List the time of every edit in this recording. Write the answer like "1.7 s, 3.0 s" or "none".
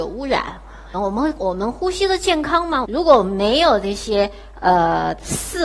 0.9 s, 2.8 s